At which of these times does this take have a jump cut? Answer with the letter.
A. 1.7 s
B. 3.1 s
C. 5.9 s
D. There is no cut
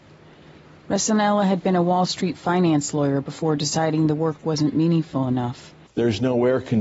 C